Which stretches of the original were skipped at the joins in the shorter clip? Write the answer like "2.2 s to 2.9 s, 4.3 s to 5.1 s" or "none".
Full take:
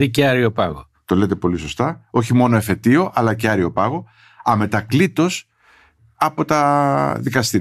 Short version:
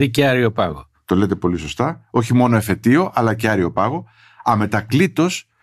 none